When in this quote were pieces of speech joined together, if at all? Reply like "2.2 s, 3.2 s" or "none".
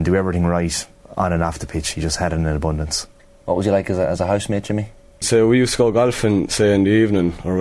5.2 s